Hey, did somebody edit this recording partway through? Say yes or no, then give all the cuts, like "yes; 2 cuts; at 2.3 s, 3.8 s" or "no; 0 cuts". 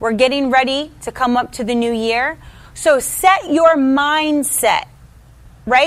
no; 0 cuts